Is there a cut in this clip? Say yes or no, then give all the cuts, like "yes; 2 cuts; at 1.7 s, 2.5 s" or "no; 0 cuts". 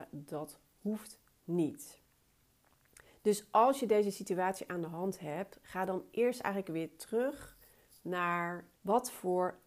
yes; 1 cut; at 8.7 s